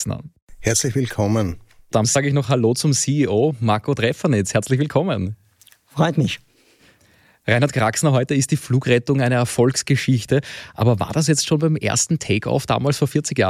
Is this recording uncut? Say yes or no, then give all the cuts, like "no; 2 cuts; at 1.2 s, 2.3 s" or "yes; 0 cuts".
yes; 0 cuts